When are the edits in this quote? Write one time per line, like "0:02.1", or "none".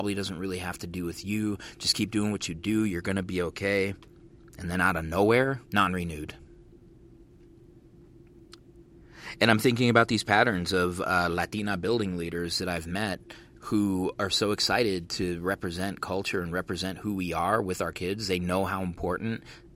0:05.6